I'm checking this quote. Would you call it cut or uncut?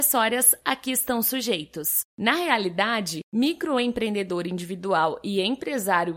cut